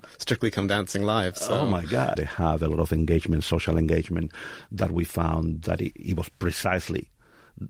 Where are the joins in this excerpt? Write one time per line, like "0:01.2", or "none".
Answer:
0:02.2